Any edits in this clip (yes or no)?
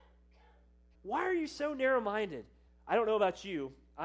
yes